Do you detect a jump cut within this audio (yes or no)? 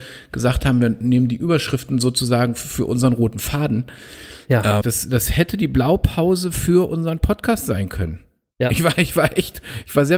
yes